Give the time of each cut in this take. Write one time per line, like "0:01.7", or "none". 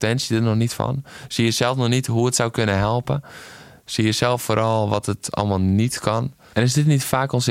0:06.5